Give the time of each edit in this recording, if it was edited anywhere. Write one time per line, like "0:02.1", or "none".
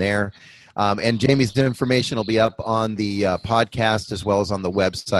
none